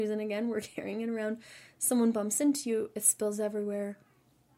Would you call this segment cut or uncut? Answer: uncut